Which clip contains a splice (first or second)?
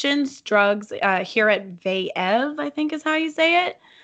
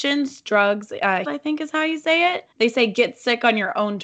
second